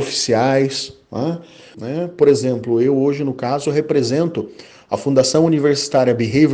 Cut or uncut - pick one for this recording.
cut